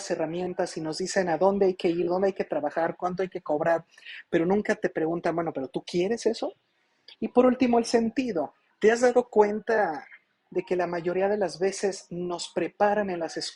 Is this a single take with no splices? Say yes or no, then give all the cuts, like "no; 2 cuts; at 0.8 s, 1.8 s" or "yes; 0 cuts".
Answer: no; 2 cuts; at 7.2 s, 8.7 s